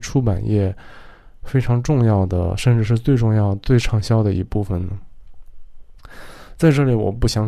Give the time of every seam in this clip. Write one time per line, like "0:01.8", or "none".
none